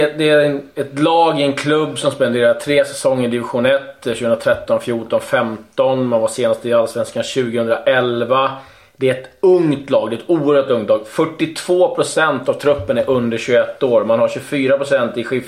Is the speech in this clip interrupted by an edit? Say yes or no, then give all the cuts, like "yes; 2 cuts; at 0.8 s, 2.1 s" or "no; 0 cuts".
no; 0 cuts